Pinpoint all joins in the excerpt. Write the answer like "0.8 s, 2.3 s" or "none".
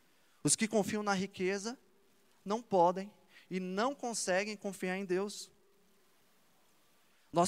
none